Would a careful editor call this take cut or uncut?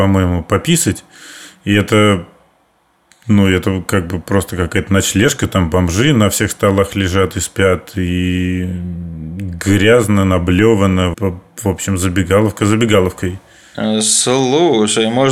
cut